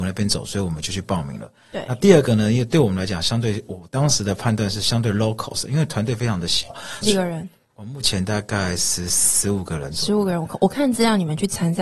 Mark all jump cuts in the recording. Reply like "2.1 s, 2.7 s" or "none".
7.0 s